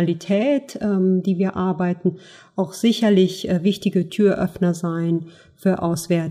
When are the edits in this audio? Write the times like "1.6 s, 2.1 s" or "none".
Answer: none